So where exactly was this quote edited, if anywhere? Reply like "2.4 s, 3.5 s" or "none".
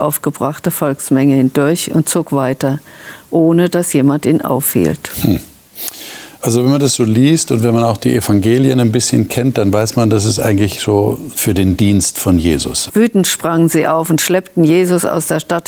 11.3 s, 12.9 s